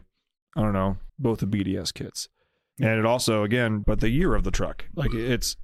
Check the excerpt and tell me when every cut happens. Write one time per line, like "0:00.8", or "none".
0:01.1
0:02.7
0:03.8